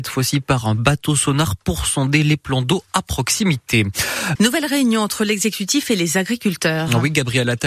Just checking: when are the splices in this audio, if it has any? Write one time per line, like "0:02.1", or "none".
0:04.4

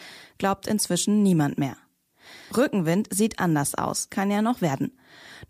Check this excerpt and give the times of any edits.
0:02.5
0:04.1

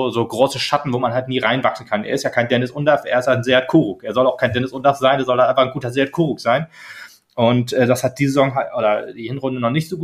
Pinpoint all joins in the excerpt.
none

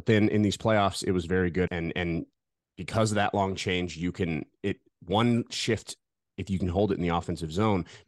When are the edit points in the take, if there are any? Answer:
0:01.7

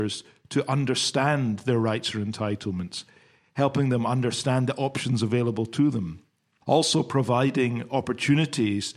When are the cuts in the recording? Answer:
0:06.6

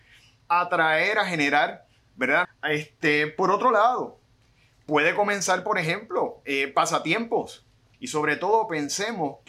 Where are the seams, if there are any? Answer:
0:02.4
0:07.9

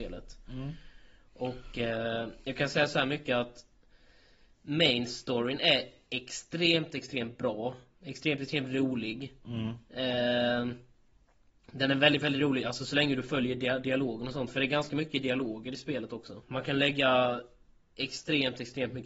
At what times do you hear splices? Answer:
0:16.4

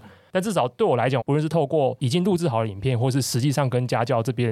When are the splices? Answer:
0:01.2

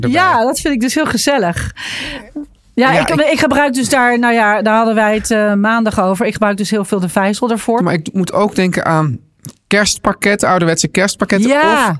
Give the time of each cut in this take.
0:07.8

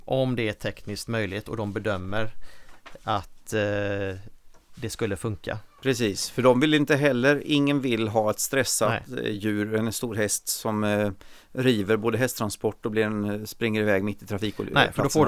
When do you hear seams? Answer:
none

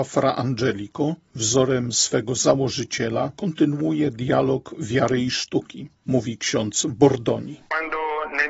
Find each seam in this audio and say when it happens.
none

